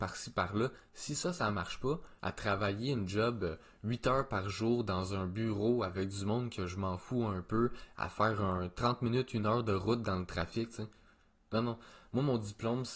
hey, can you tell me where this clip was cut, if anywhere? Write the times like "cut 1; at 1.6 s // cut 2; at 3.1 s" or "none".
cut 1; at 2.2 s